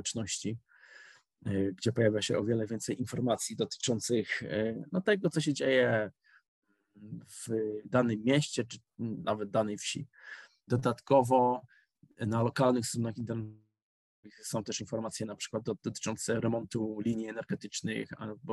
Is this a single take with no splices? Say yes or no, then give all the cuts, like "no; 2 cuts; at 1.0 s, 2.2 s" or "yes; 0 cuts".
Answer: no; 1 cut; at 10.7 s